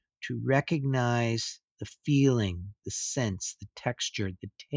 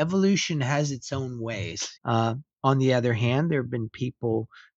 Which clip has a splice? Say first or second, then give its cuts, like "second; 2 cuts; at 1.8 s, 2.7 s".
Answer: second; 1 cut; at 2.0 s